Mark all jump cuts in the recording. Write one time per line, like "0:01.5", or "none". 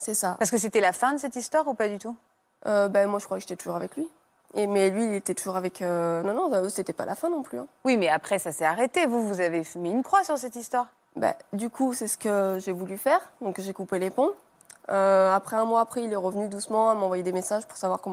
none